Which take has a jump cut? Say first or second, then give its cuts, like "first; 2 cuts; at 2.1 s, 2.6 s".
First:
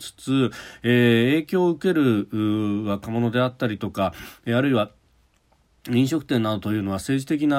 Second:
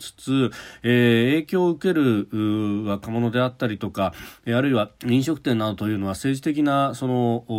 second; 1 cut; at 5.0 s